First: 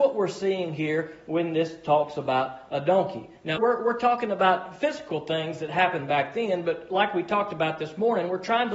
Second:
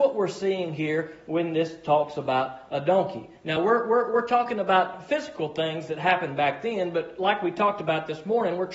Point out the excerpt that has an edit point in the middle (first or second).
first